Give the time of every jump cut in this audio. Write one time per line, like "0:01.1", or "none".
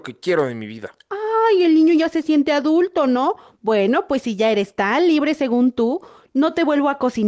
none